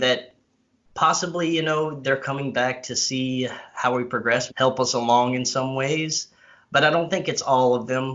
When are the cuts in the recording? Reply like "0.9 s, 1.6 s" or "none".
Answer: 2.0 s, 4.5 s